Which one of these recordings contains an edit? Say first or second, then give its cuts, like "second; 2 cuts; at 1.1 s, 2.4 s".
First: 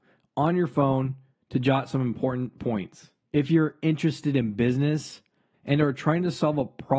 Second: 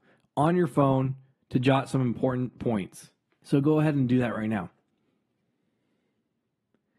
first; 2 cuts; at 3.2 s, 5.5 s